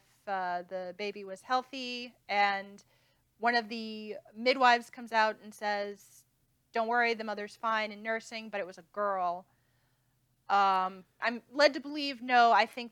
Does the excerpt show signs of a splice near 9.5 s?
no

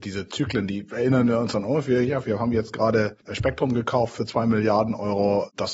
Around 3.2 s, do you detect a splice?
yes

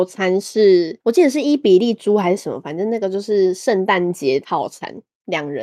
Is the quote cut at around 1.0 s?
no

